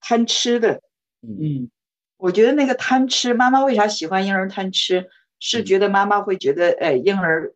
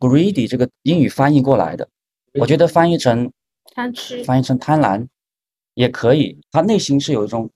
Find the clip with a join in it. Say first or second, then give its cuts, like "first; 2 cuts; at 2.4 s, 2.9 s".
second; 2 cuts; at 4.2 s, 6.4 s